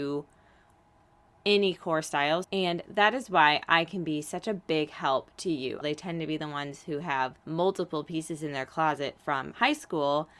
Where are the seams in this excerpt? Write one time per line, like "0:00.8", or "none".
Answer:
0:02.4
0:05.8
0:07.4